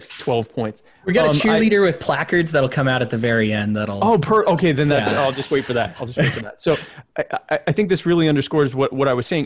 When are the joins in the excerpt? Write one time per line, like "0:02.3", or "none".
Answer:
none